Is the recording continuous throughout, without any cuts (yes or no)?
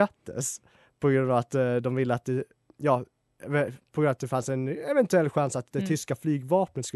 yes